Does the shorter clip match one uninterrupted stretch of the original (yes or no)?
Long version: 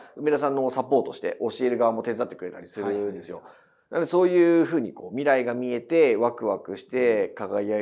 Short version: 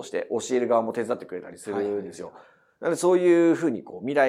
yes